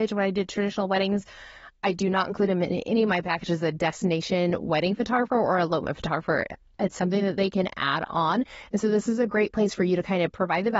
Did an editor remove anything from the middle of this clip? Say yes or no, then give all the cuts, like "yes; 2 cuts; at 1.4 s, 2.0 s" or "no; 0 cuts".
no; 0 cuts